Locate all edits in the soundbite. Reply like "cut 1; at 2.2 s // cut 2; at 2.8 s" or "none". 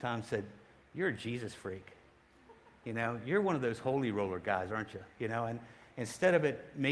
none